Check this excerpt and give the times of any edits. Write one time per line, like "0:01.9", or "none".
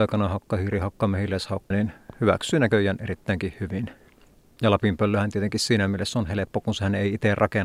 0:01.7